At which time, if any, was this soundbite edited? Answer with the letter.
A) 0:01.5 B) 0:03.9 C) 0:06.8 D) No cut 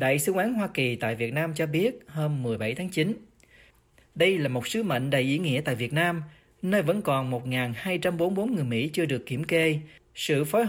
B